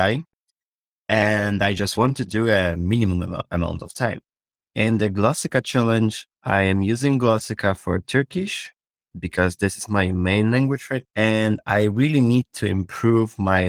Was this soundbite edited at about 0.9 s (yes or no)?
no